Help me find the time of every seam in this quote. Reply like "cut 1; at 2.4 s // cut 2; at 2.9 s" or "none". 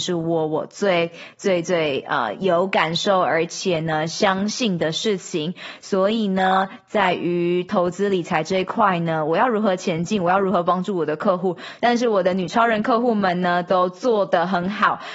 cut 1; at 11.8 s